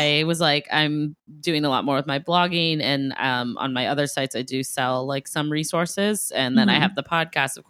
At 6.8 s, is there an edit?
no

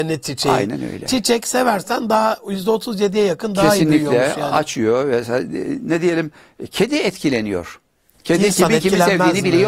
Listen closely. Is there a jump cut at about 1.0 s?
no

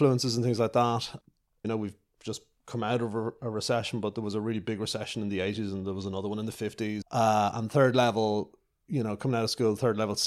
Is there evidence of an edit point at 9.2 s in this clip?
no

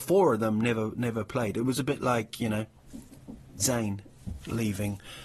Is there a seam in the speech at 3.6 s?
yes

